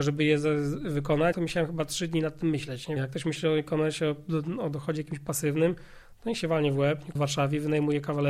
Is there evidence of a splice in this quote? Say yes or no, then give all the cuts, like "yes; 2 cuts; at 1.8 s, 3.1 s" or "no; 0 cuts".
yes; 3 cuts; at 1.3 s, 3.0 s, 7.2 s